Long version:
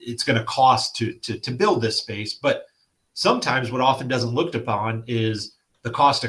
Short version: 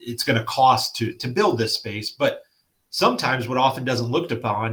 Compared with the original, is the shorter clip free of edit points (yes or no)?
no